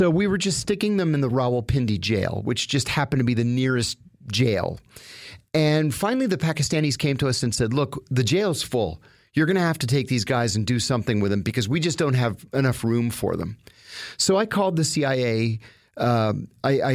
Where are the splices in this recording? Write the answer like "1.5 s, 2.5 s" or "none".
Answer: none